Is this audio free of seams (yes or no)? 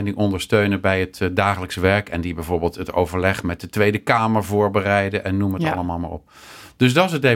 yes